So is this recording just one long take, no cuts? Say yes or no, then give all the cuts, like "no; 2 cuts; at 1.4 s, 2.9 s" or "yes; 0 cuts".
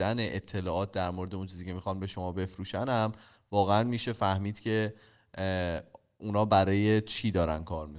yes; 0 cuts